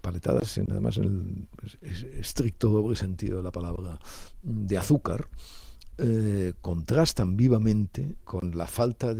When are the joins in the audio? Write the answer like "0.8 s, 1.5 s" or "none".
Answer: 8.2 s